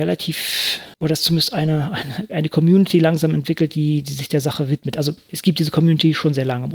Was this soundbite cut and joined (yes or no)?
yes